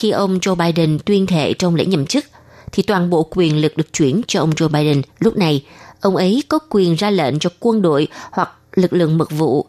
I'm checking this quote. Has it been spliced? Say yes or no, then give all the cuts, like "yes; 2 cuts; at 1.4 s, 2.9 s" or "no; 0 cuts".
yes; 1 cut; at 5.1 s